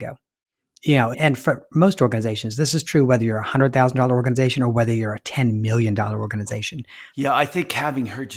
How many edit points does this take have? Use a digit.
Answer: 2